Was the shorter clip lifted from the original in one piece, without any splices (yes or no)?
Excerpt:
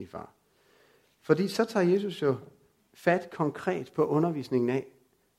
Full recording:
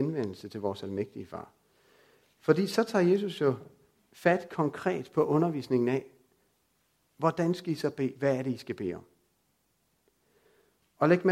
yes